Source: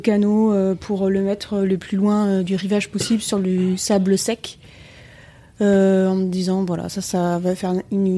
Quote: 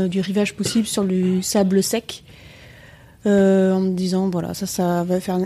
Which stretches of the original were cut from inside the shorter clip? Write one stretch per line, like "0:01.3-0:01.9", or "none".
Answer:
none